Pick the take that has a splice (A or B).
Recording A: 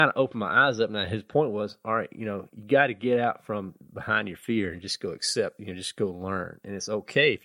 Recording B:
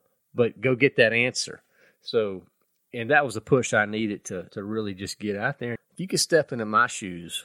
B